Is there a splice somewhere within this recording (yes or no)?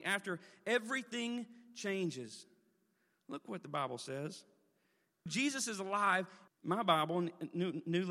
yes